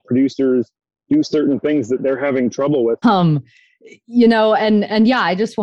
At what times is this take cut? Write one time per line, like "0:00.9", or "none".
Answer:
0:03.0

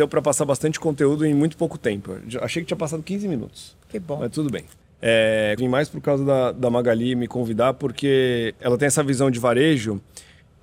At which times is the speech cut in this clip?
0:05.6

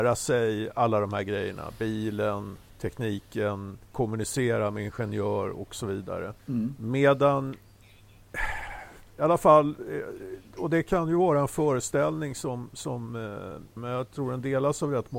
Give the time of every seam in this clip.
0:06.4
0:13.8

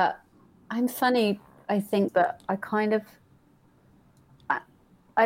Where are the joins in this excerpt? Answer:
0:02.1

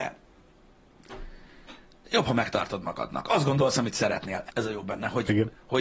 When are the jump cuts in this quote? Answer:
0:04.5

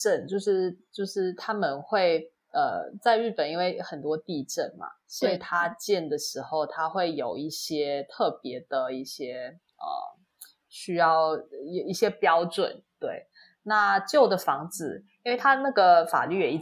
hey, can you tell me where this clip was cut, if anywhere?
none

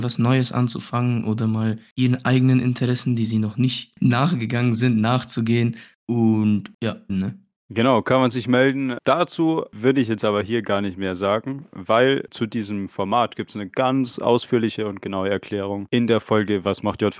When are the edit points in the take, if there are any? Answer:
0:07.1

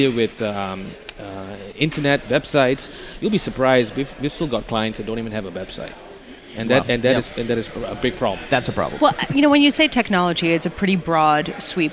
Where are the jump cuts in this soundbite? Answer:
none

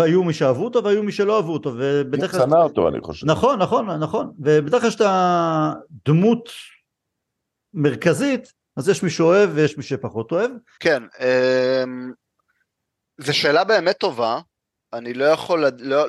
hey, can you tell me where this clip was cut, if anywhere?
0:10.8

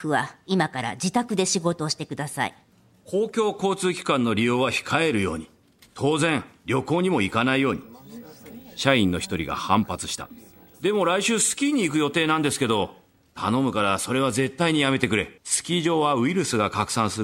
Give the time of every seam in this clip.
0:15.4

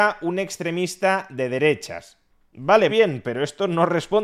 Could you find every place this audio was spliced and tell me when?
0:02.9

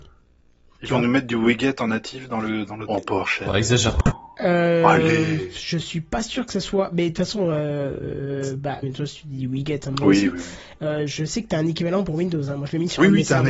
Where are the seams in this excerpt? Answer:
0:02.9
0:08.8

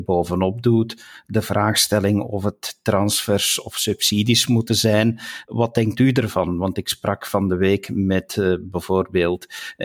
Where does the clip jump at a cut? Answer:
none

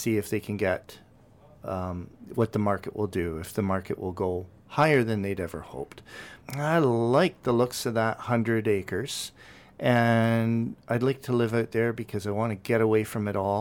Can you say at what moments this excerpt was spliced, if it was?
0:06.4

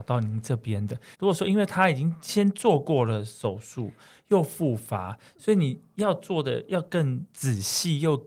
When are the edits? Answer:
0:01.1

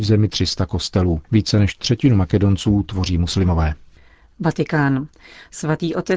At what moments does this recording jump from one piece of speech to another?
0:01.2

